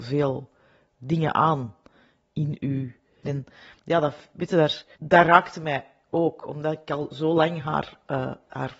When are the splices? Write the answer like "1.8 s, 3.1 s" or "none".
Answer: 3.2 s, 4.9 s